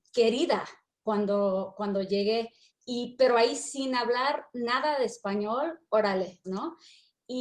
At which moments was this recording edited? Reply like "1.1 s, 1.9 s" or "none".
2.7 s, 6.4 s